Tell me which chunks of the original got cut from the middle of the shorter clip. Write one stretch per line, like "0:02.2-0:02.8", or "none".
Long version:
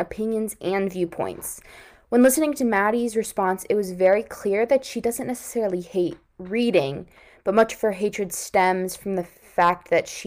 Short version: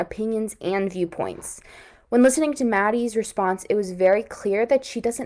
none